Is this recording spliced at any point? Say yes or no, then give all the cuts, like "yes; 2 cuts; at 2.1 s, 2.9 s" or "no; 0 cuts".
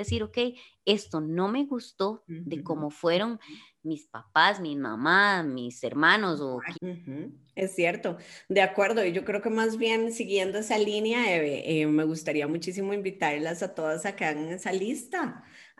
yes; 1 cut; at 6.7 s